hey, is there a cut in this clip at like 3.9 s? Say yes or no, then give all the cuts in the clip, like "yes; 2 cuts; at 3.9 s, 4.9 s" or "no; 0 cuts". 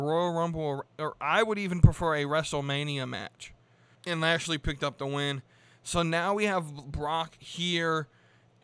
yes; 1 cut; at 3.9 s